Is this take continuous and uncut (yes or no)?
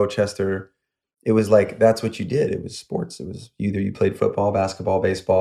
yes